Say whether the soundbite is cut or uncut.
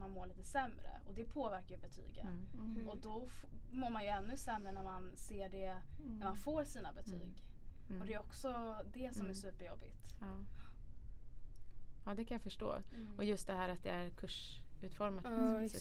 uncut